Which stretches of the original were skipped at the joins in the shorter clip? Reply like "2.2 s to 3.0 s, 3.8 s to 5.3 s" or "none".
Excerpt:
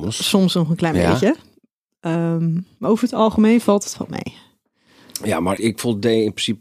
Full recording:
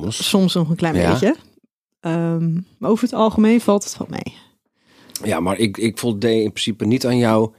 5.6 s to 5.8 s